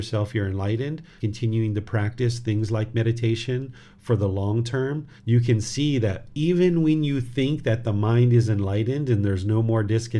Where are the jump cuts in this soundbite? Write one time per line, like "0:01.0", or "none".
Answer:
0:01.2
0:05.2

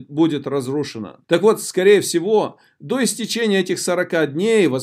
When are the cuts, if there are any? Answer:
0:01.2

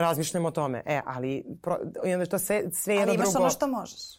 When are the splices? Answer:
none

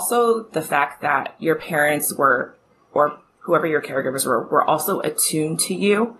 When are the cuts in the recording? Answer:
none

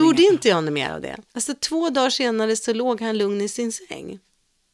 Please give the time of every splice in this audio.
0:01.3

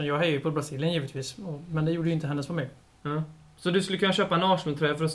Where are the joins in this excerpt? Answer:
0:02.8

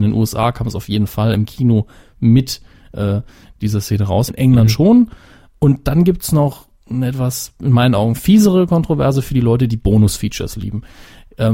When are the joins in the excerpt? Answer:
0:04.3

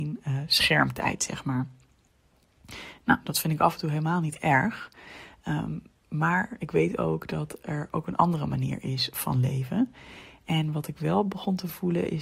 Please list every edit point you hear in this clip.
none

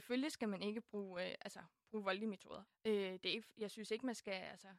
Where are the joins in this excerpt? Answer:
0:02.7

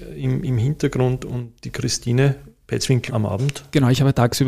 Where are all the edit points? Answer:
0:03.1

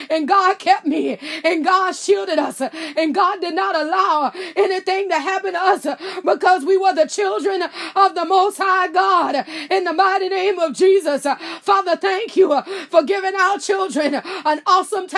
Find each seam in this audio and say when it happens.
none

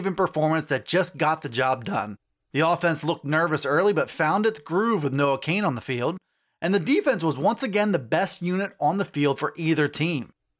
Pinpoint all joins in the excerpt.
none

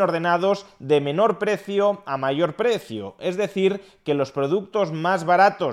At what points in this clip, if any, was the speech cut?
none

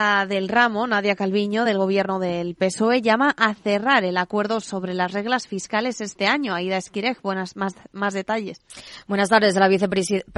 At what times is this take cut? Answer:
none

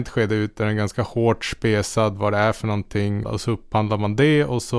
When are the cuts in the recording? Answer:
0:03.2

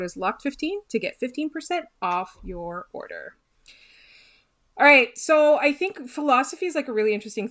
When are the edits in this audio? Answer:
none

